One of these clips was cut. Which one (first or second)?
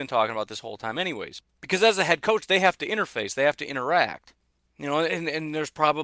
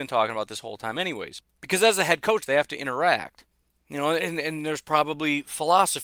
second